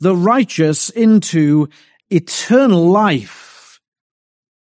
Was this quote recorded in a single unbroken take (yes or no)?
yes